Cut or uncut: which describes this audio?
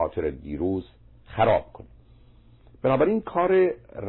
uncut